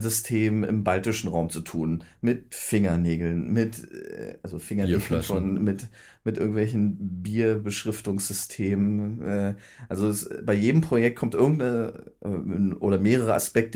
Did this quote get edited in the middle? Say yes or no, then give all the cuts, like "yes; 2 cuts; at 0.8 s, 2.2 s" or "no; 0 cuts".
no; 0 cuts